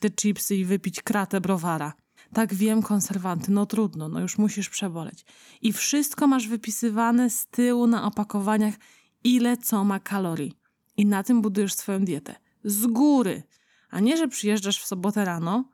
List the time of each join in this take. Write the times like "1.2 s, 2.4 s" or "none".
2.2 s